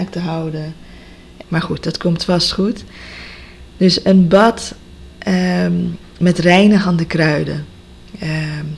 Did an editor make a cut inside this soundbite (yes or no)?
yes